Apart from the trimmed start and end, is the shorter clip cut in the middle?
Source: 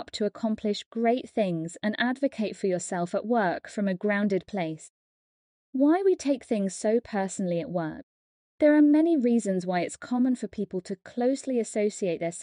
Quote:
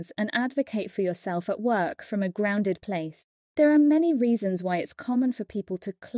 yes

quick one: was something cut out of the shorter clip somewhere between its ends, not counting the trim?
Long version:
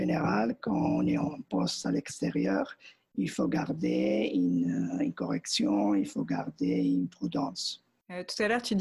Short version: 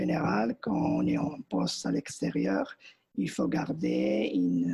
no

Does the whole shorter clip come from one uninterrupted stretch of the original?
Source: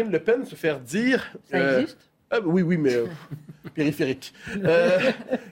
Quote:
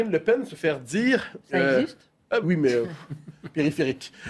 no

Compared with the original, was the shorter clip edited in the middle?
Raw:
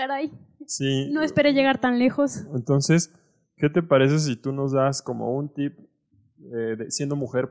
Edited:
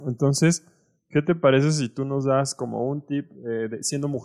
yes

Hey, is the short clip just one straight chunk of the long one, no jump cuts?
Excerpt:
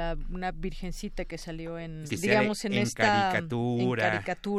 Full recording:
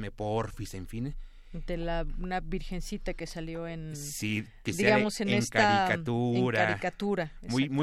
no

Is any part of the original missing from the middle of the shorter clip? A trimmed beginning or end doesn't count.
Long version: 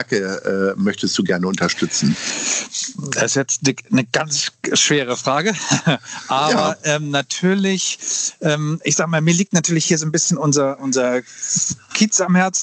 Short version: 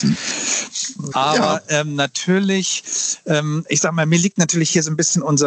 yes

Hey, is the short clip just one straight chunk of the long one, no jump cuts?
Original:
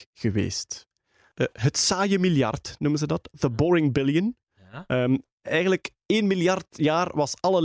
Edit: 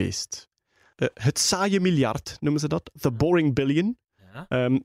yes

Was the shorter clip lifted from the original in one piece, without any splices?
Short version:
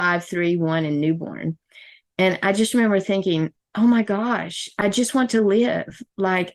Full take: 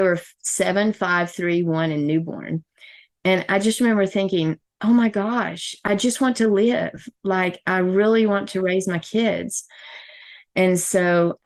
yes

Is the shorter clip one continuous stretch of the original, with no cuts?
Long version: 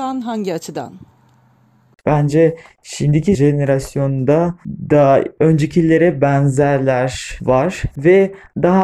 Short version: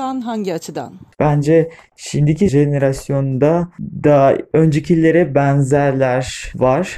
no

